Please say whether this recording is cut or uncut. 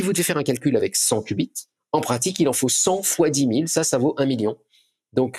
cut